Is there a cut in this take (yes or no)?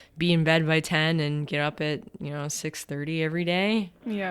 no